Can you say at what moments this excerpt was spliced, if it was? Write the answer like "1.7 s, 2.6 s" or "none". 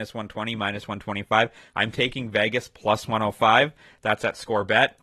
none